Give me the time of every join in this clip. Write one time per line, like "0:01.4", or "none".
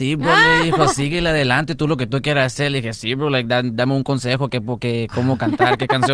none